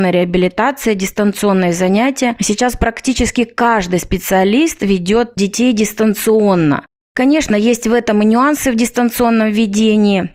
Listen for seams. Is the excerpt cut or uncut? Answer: uncut